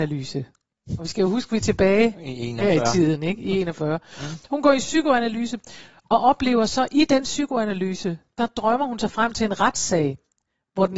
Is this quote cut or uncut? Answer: uncut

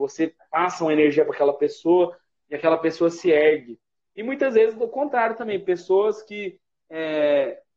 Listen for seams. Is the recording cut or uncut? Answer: uncut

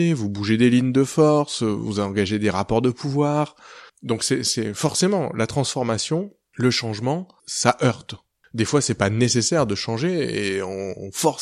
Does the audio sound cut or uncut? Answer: cut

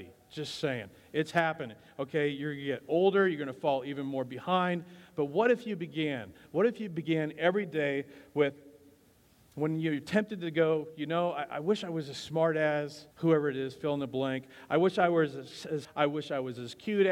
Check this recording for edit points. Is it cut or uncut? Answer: cut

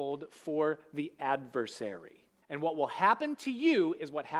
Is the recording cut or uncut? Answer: cut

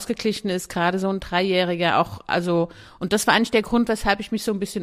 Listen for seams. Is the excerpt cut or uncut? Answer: uncut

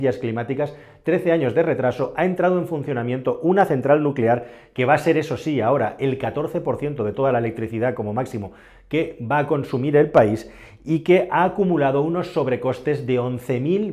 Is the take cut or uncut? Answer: uncut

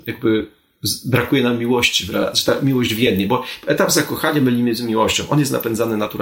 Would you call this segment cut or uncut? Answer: uncut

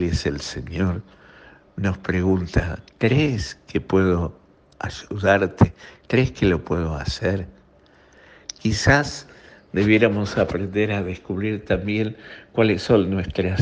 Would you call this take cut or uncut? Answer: uncut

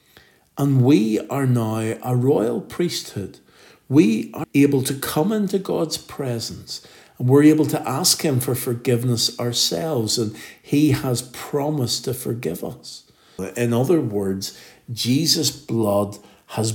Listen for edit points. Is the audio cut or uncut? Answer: cut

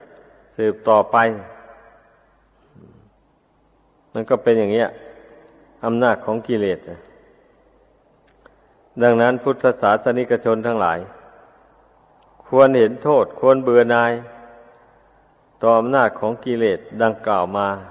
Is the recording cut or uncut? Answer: uncut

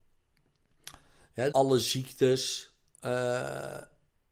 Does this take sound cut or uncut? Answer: cut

